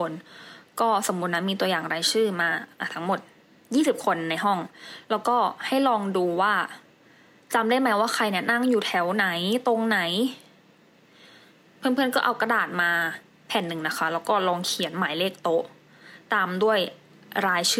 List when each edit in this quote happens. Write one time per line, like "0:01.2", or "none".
none

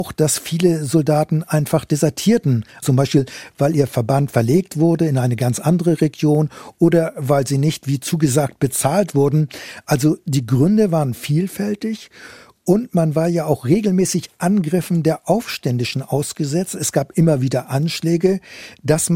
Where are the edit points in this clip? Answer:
0:02.8

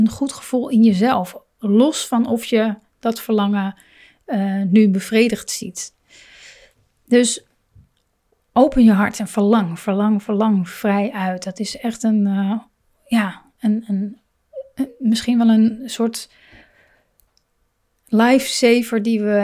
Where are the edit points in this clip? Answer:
none

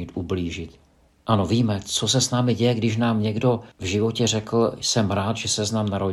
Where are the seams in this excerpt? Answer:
0:01.1
0:03.7

